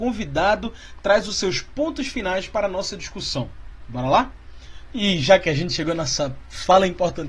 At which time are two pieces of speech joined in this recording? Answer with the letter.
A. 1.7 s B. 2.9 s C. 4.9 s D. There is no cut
C